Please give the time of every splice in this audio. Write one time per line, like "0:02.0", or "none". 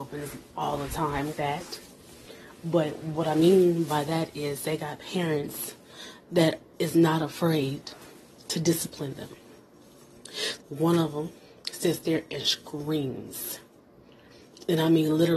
0:01.3
0:10.6

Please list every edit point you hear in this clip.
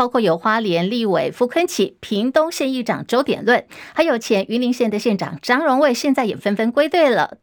none

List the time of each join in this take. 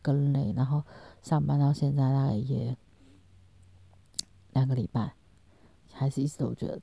0:05.8

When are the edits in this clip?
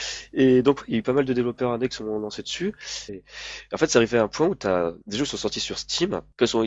0:03.1
0:05.0

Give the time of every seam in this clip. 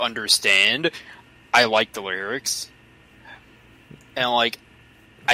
none

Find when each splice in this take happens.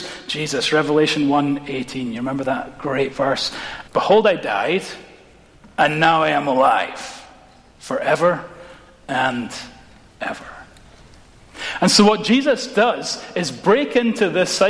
0:03.9

